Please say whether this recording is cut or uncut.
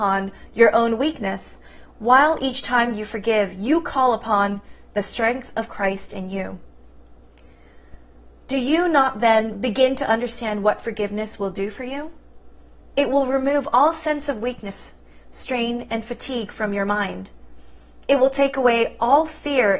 uncut